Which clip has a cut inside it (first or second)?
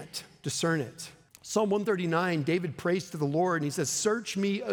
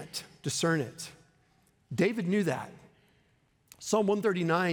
first